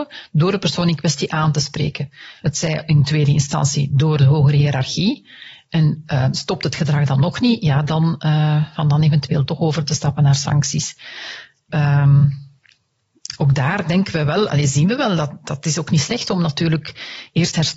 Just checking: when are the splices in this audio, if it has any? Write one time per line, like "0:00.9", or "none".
0:02.4
0:11.7